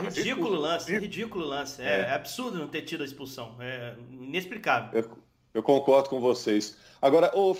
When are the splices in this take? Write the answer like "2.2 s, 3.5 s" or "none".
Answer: none